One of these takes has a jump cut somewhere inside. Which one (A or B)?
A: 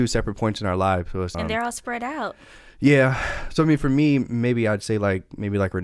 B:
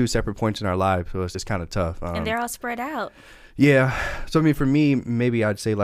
A